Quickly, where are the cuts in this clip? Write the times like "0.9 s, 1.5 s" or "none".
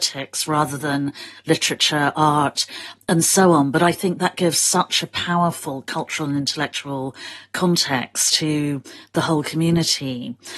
none